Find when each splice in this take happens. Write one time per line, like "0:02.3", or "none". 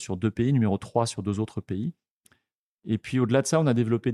none